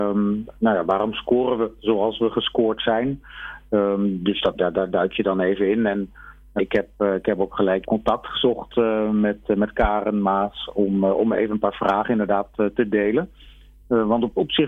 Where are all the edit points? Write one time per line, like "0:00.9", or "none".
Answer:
0:06.6
0:07.8